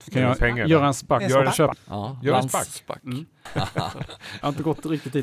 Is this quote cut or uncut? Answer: cut